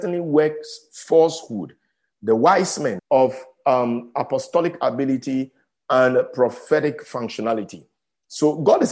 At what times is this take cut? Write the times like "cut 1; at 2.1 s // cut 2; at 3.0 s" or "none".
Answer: cut 1; at 3.0 s